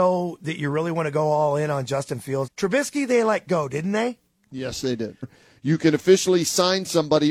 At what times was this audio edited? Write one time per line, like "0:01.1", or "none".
0:02.5
0:05.2